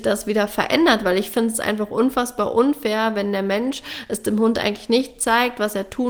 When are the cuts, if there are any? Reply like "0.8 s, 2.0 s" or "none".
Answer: none